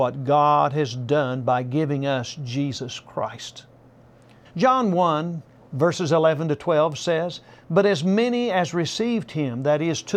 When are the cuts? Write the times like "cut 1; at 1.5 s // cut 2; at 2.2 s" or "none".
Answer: cut 1; at 4.4 s